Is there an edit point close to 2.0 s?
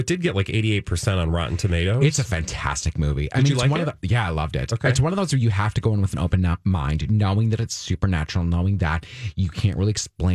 no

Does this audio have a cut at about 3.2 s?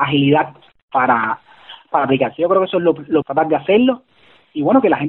yes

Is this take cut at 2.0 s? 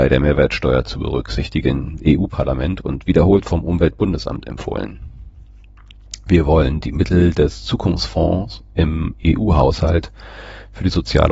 yes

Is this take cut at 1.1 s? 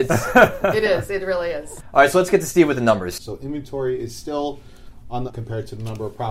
no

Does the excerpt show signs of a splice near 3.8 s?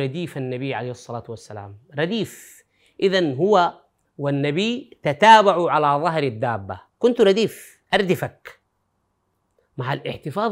no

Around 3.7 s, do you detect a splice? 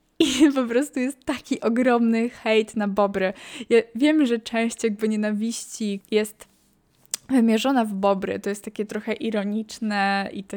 no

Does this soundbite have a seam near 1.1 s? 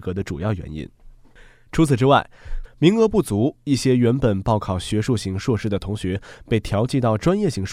no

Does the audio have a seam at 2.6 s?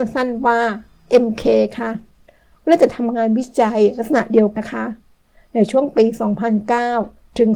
no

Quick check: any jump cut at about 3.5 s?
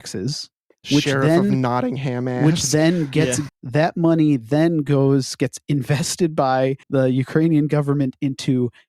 yes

